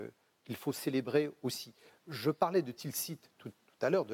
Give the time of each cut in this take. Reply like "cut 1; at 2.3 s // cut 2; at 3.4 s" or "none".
none